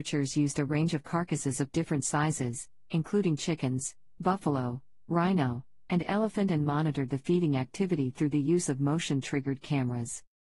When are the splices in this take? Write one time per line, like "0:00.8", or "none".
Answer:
0:04.2